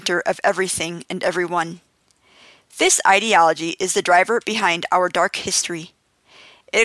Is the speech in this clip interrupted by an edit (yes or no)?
no